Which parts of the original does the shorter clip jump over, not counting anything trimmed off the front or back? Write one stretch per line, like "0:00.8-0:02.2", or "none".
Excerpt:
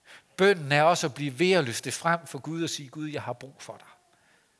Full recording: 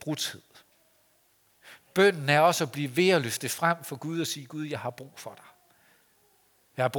none

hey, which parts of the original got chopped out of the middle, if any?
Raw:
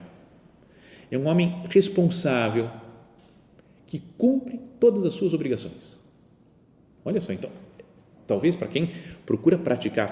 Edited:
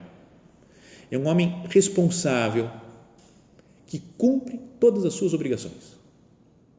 none

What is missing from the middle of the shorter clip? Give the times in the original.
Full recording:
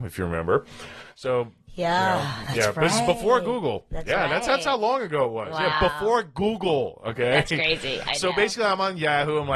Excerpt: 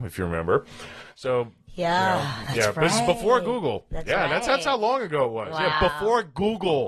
none

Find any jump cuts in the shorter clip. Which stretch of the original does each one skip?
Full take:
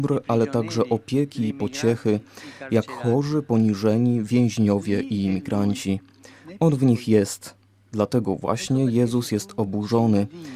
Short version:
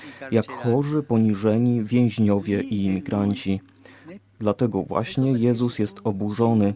0:06.6-0:07.7

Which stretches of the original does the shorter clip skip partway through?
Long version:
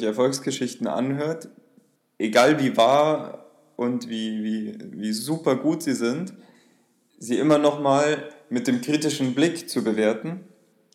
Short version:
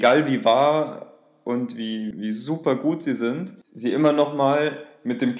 0:04.4-0:04.9
0:06.4-0:07.1

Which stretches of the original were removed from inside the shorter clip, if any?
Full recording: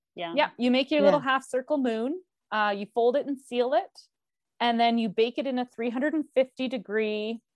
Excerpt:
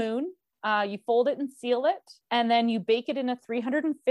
0:04.1-0:04.5

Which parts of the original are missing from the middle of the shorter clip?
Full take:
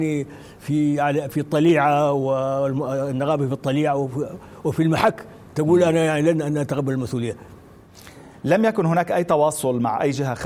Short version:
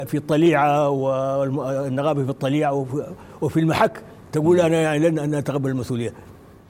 none

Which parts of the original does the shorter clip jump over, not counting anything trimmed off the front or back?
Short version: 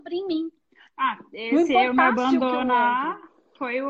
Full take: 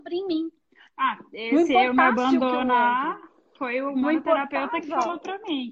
none

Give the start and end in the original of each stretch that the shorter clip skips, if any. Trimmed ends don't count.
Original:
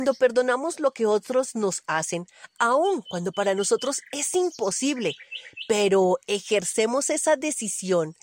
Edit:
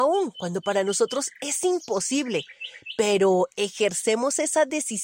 none

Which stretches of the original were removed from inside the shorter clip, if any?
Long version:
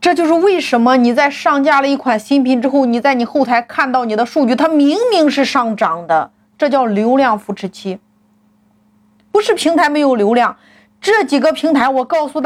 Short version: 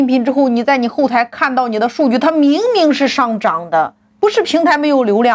0:06.5-0:09.2

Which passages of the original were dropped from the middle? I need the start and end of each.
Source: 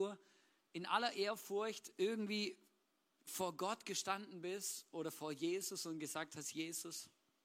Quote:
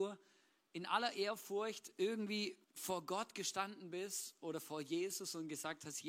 0:02.6-0:03.1

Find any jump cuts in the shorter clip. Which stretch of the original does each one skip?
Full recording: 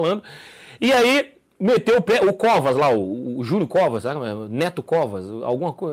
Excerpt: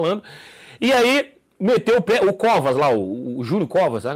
none

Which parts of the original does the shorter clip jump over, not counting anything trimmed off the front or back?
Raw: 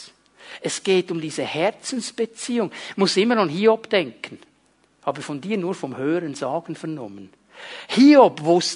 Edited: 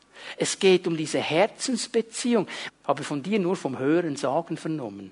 0:02.9-0:04.9

